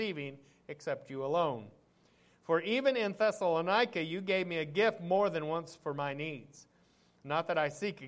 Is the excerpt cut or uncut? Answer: uncut